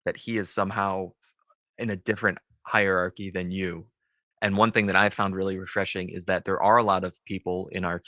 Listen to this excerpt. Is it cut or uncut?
cut